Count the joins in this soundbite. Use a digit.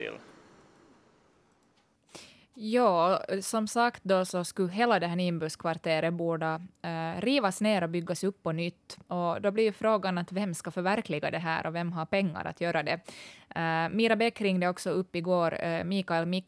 0